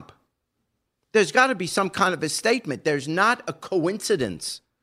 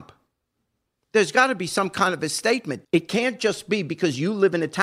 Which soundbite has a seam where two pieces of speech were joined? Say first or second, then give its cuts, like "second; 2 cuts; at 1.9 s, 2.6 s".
second; 1 cut; at 2.8 s